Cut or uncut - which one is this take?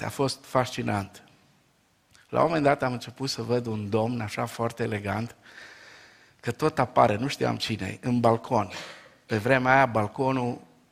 uncut